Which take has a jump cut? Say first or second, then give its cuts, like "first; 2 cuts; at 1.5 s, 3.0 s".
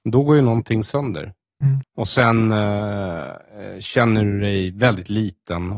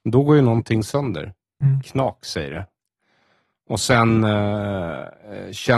first; 1 cut; at 1.8 s